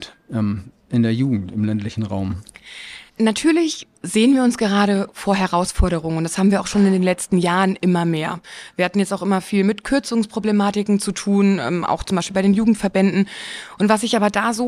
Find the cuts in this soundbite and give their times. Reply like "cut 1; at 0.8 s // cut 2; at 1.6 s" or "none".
cut 1; at 3.1 s